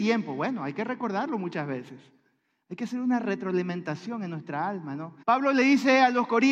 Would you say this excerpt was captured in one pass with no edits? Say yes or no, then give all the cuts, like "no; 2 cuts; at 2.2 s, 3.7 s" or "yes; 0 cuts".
no; 1 cut; at 5.2 s